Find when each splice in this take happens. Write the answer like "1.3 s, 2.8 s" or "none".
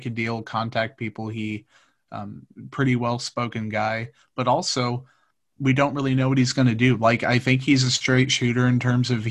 none